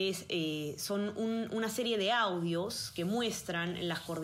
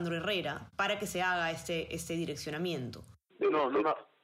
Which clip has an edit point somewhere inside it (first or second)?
second